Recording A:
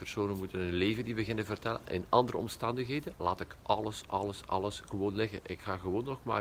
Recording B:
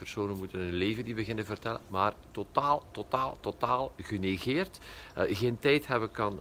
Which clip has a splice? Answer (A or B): A